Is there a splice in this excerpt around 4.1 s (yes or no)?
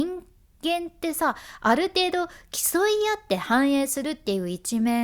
no